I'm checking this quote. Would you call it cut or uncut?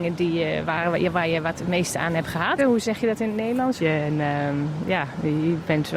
cut